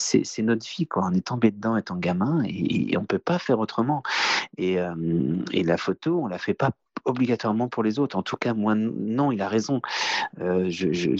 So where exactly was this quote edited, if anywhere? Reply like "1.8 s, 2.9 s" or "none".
none